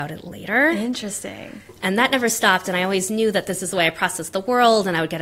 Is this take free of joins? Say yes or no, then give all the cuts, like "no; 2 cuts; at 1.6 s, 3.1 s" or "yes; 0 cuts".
yes; 0 cuts